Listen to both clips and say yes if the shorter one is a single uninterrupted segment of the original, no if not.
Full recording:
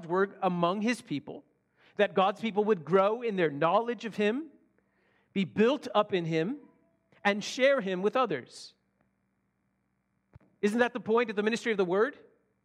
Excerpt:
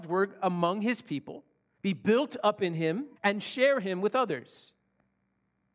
no